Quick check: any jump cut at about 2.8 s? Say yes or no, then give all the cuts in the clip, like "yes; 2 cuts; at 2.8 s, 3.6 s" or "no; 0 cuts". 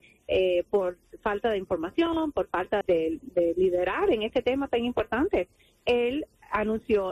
yes; 1 cut; at 2.8 s